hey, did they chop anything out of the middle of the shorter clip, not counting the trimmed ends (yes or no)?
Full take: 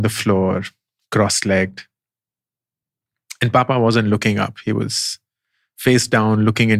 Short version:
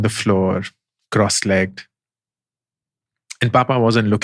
no